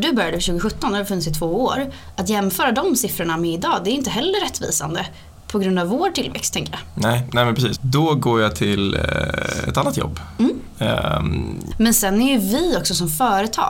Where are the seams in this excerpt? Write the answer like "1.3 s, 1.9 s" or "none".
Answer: 7.7 s, 11.7 s